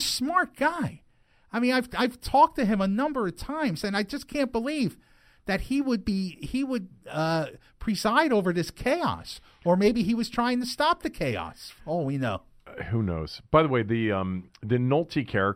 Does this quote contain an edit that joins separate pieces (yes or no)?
no